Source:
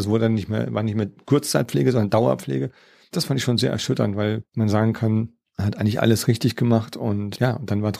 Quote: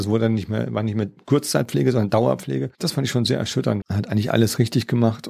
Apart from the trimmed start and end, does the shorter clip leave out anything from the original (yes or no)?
yes